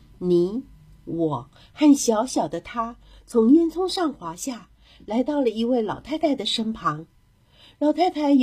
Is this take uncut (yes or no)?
yes